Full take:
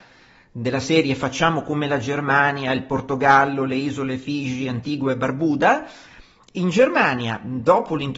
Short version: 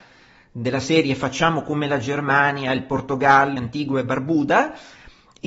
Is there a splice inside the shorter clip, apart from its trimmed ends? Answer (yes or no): yes